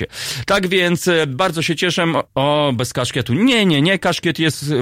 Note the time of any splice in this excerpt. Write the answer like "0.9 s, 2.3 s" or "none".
2.3 s